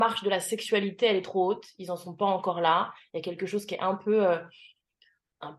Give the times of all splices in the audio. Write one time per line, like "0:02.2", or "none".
none